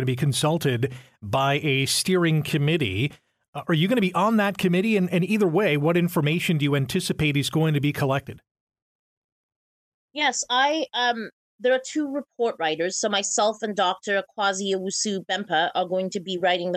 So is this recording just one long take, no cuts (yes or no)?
yes